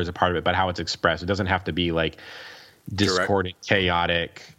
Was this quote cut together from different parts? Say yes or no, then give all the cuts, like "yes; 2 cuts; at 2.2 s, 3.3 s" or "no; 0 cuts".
no; 0 cuts